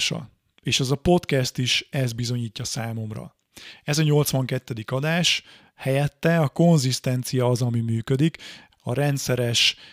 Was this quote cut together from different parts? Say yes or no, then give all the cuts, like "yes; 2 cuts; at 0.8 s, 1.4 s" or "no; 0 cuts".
yes; 2 cuts; at 5.7 s, 8.7 s